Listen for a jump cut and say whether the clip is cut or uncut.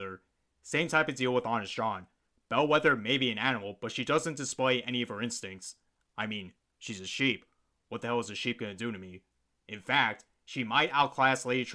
uncut